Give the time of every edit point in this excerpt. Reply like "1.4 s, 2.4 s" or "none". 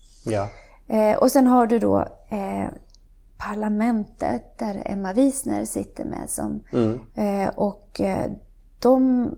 7.1 s